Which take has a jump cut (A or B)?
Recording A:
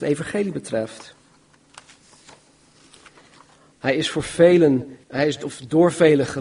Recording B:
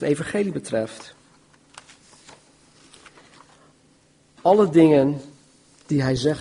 A